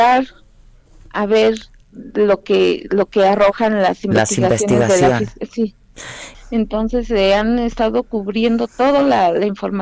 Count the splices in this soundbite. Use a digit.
1